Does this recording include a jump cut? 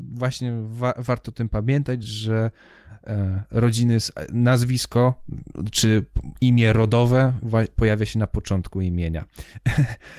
no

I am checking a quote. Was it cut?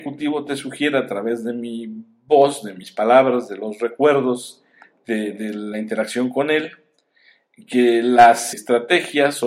yes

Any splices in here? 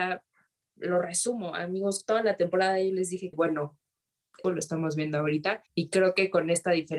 yes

